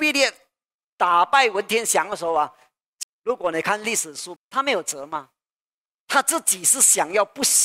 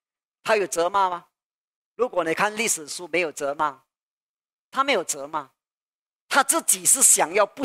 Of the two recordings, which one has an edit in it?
first; 2 cuts; at 3.0 s, 4.4 s

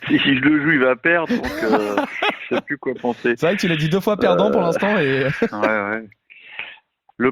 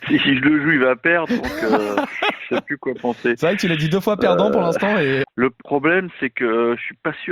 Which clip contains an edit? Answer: second; 1 cut; at 5.2 s

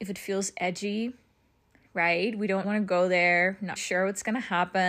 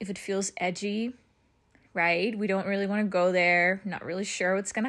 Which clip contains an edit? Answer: first; 2 cuts; at 2.6 s, 3.8 s

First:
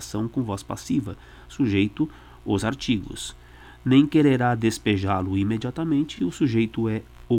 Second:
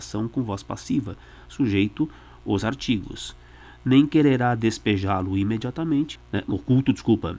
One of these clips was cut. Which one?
second; 1 cut; at 6.2 s

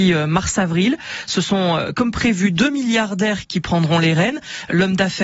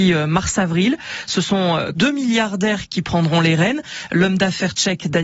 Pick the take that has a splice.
second; 1 cut; at 1.9 s

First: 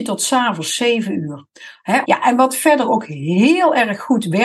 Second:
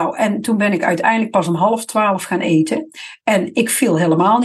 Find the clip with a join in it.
first; 1 cut; at 2.0 s

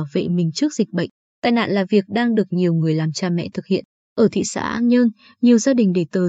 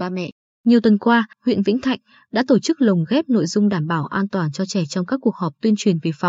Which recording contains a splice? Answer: second; 1 cut; at 1.3 s

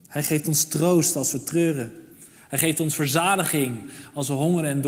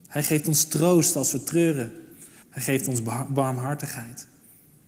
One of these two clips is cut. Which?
second; 1 cut; at 2.4 s

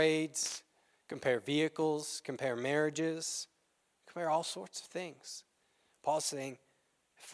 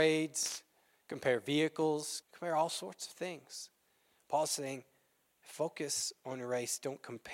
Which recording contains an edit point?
second; 1 cut; at 2.2 s

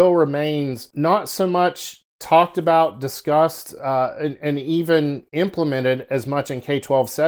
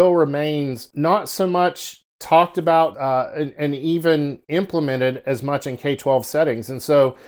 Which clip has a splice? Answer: second; 1 cut; at 2.9 s

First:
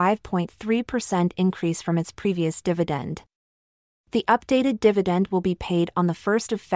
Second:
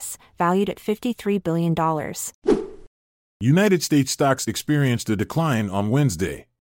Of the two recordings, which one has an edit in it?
second; 1 cut; at 3.3 s

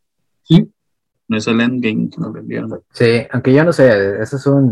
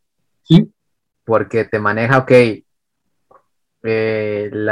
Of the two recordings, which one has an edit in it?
first; 2 cuts; at 1.1 s, 2.8 s

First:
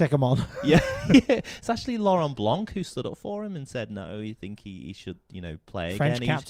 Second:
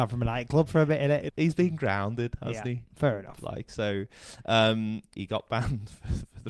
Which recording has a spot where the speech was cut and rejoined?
second; 2 cuts; at 1.3 s, 5.1 s

